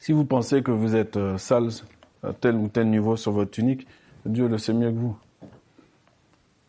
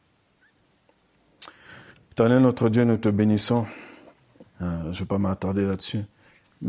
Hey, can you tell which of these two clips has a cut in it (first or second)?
second